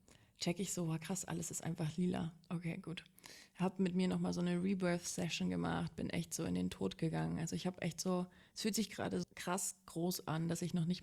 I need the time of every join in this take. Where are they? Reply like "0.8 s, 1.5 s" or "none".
9.2 s